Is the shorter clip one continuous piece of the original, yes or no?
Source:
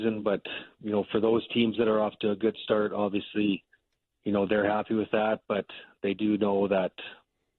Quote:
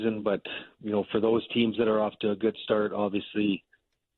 yes